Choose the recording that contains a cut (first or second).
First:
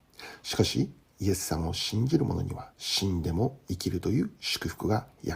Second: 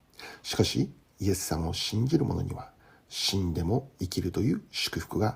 first